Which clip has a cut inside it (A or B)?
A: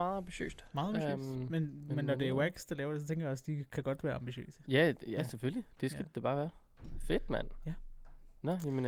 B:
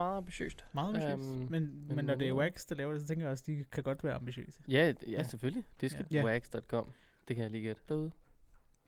B